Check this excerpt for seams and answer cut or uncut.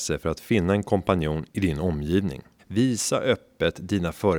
cut